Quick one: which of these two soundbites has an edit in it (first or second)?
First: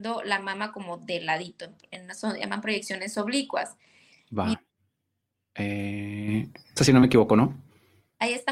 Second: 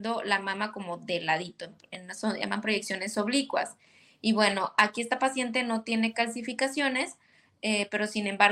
first